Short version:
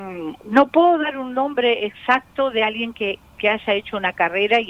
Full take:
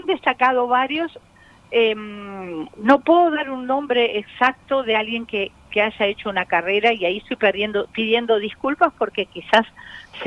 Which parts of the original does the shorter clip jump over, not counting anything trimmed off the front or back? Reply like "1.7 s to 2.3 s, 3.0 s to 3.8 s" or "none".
none